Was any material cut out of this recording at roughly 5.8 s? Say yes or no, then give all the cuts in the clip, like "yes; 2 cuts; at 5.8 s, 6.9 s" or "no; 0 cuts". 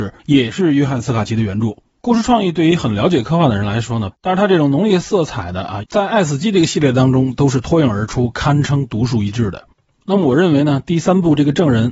yes; 3 cuts; at 2.0 s, 4.1 s, 5.8 s